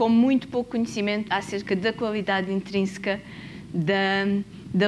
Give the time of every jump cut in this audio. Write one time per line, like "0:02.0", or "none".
0:01.3